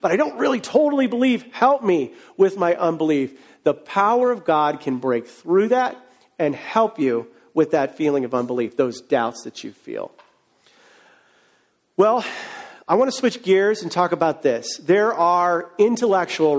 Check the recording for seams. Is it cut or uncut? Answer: uncut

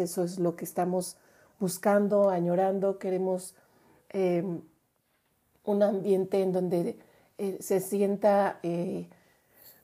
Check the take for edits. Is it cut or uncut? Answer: uncut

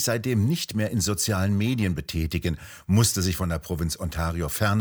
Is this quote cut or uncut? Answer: uncut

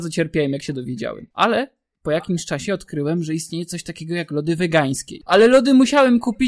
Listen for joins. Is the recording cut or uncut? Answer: cut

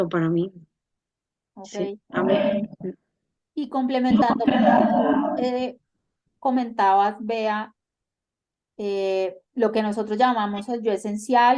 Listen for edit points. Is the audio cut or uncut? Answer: uncut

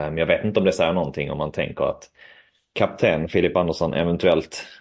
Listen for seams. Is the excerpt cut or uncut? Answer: uncut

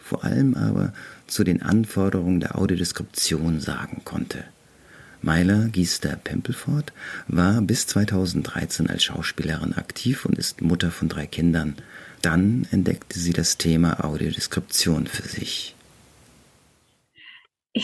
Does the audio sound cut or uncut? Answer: uncut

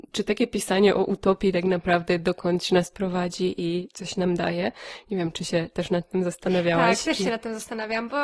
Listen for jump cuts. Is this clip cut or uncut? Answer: uncut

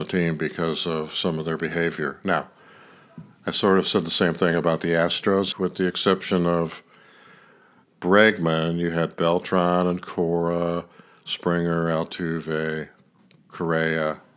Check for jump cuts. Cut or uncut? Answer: cut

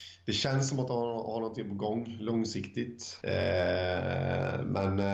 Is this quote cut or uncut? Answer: cut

